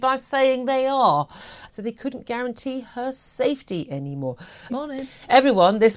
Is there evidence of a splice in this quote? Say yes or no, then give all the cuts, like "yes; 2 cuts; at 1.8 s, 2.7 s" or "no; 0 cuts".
yes; 2 cuts; at 1.7 s, 4.7 s